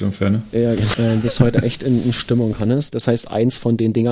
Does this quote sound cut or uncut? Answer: cut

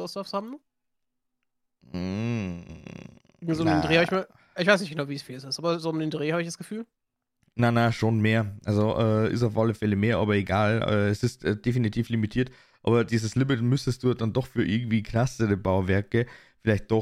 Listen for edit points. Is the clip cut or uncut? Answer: uncut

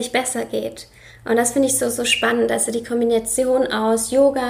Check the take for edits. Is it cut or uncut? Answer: uncut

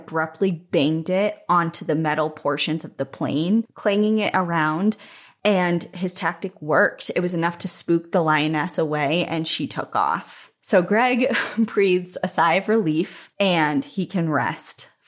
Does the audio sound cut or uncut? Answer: uncut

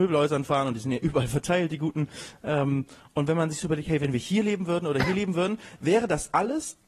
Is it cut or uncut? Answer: uncut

